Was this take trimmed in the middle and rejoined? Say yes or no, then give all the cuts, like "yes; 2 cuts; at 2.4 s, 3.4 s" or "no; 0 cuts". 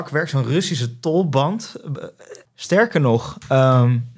yes; 1 cut; at 2.5 s